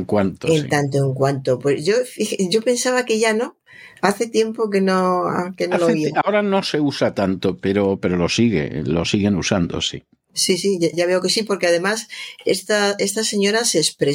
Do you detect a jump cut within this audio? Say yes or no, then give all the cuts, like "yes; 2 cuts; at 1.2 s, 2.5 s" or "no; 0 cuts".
yes; 1 cut; at 10.9 s